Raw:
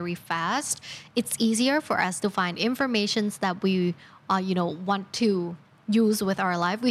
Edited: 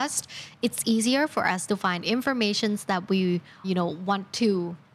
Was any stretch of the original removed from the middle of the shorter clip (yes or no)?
yes